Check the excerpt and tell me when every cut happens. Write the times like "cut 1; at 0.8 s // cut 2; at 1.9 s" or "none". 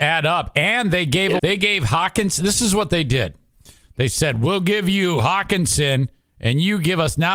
cut 1; at 1.4 s